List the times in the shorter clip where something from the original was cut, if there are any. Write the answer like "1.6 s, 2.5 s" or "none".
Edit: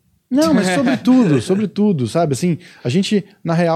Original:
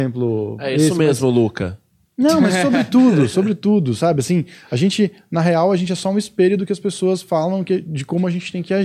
none